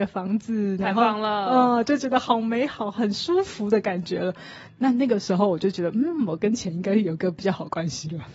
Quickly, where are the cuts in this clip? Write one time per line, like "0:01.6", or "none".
none

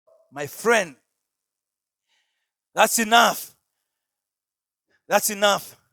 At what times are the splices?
none

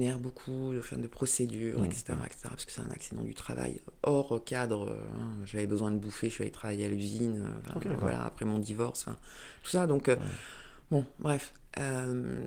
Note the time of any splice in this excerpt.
none

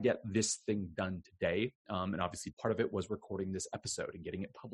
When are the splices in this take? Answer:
0:02.5

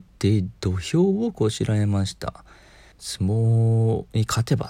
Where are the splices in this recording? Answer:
0:02.9

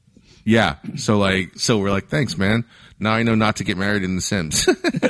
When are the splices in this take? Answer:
0:01.6

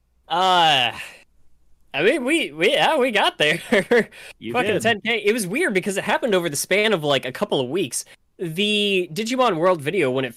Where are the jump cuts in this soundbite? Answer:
none

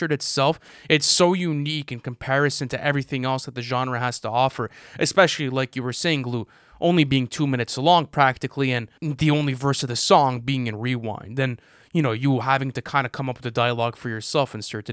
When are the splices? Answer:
0:09.0

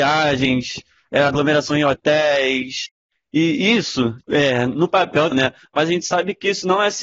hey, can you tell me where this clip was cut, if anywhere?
0:04.2
0:05.3

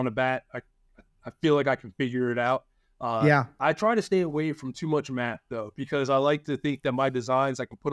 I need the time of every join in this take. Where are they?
0:03.6

